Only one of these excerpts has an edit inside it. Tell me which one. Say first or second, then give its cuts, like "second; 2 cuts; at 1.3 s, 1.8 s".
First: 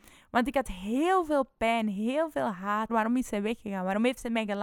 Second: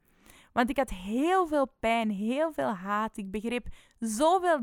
first; 1 cut; at 2.9 s